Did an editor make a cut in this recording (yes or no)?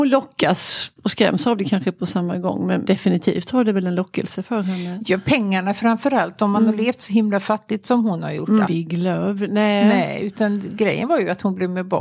yes